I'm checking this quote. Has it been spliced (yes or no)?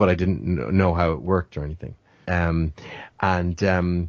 yes